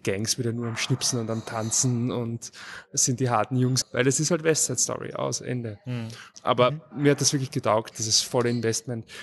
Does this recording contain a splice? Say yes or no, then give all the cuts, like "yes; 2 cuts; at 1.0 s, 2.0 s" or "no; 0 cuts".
yes; 3 cuts; at 3.8 s, 6.3 s, 7.9 s